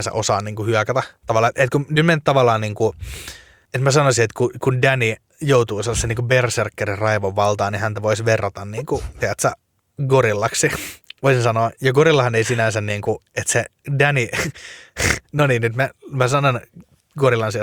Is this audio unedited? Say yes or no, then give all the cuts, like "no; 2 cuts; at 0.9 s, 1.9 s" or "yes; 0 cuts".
yes; 0 cuts